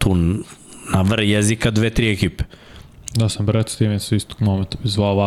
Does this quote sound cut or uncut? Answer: cut